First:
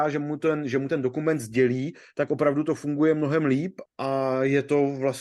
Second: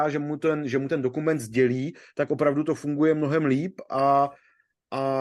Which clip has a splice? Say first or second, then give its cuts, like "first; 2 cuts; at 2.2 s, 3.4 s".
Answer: first; 1 cut; at 3.9 s